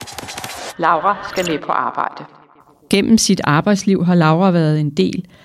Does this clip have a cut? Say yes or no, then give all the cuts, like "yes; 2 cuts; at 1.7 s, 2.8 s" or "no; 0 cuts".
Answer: no; 0 cuts